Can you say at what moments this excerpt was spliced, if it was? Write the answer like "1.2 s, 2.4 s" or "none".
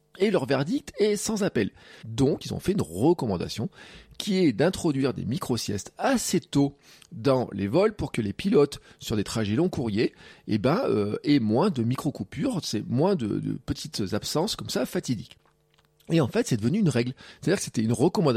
2.0 s